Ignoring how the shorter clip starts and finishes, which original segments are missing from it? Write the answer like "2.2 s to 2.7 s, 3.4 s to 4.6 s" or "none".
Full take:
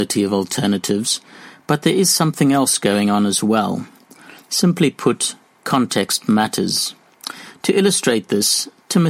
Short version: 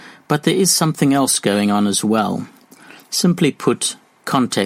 none